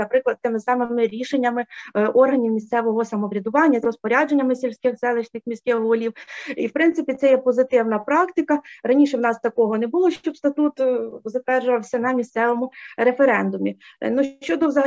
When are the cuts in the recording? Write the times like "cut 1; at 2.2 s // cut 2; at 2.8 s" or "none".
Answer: cut 1; at 3.8 s